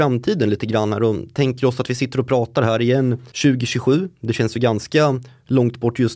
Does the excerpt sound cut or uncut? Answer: cut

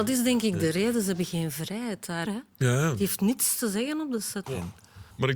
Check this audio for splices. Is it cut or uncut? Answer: cut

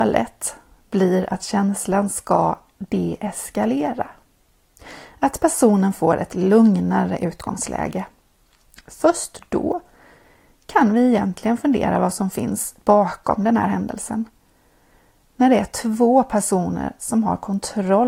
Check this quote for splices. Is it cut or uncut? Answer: uncut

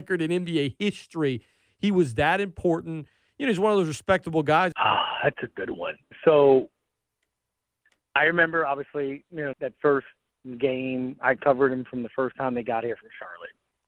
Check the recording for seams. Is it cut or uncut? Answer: cut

